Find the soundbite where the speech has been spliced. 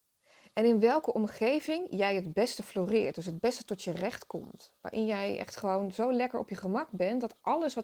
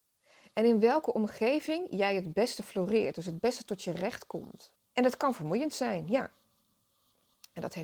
second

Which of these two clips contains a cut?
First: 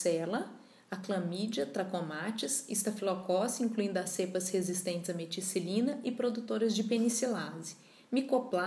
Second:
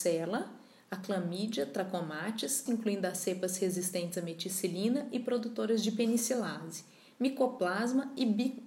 second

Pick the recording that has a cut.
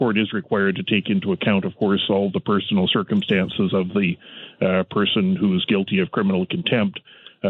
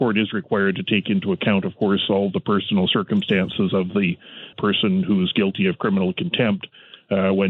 second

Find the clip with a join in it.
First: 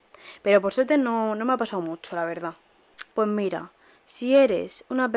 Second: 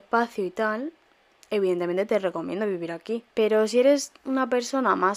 first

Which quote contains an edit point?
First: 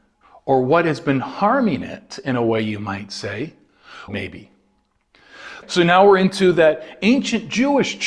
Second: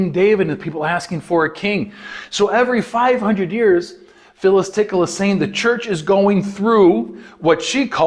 first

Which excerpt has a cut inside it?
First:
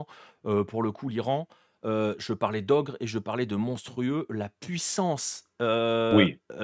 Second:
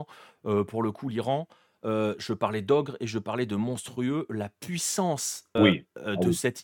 second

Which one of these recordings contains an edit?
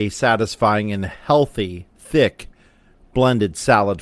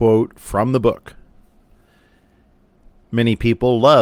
second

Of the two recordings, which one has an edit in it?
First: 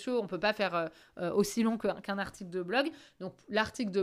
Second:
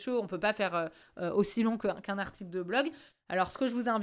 second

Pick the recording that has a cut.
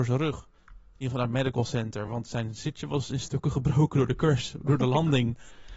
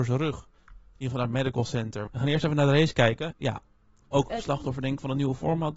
second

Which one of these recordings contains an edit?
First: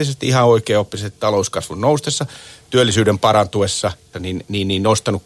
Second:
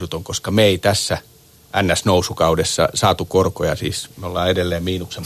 first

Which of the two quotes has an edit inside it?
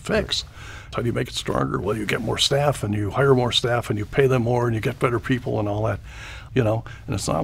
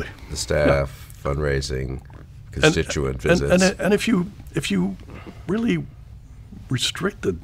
first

